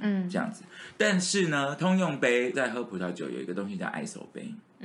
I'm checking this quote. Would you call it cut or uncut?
cut